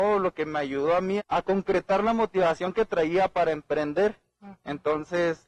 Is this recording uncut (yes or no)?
no